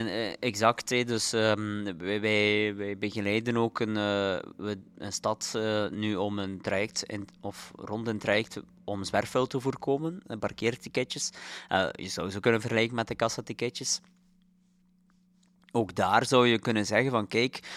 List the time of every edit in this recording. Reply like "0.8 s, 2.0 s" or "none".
10.2 s